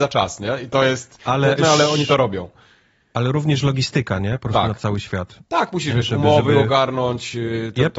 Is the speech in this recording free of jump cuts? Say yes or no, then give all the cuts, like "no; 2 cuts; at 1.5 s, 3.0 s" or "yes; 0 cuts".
no; 1 cut; at 1.6 s